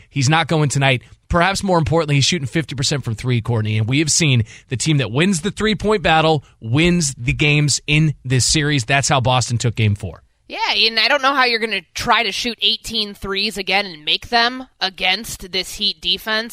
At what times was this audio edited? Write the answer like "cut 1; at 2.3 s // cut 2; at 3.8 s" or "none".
none